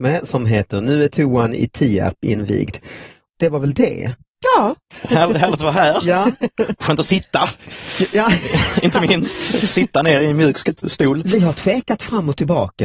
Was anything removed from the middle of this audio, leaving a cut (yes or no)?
yes